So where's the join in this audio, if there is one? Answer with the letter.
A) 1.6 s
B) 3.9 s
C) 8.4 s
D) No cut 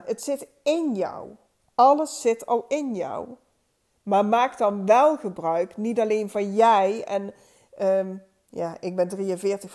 A